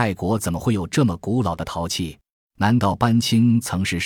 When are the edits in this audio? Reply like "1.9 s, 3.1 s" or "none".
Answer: 2.3 s